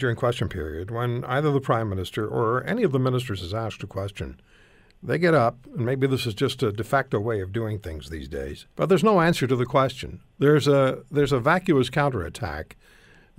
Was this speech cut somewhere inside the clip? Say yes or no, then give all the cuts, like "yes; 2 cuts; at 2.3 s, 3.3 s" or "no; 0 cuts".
yes; 1 cut; at 8.7 s